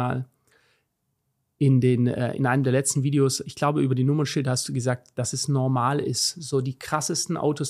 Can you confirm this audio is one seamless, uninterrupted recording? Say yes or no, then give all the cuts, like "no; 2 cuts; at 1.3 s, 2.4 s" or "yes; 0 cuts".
yes; 0 cuts